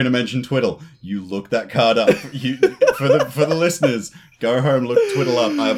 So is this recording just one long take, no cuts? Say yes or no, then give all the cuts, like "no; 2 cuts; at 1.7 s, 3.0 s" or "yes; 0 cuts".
yes; 0 cuts